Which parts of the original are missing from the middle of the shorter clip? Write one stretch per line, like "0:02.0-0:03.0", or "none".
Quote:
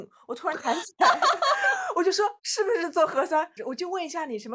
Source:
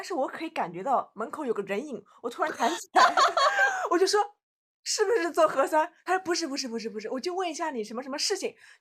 0:04.3-0:04.8
0:06.0-0:07.0